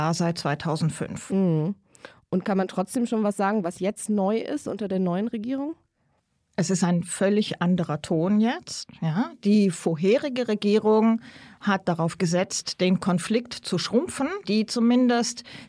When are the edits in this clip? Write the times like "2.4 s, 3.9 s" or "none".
14.4 s